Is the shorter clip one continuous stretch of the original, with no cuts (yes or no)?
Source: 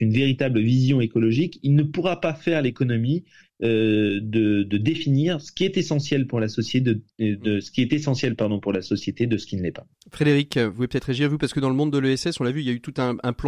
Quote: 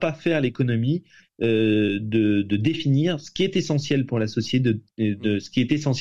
yes